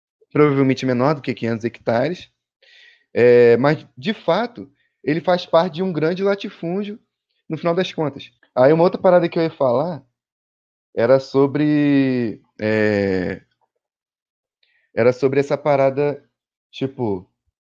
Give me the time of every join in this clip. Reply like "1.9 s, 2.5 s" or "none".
8.4 s